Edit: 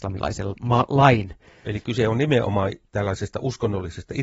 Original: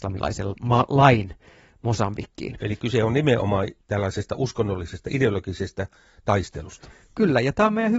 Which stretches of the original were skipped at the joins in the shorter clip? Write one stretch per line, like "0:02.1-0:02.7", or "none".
0:01.6-0:02.6